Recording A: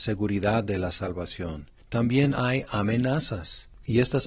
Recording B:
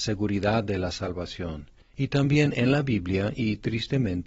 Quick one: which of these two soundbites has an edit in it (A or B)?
B